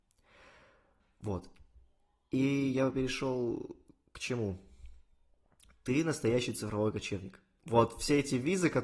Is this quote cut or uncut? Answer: uncut